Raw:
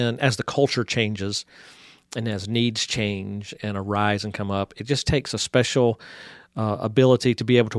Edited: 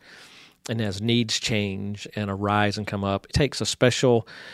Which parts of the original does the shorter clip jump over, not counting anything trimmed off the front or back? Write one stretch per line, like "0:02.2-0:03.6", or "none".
0:04.8-0:05.0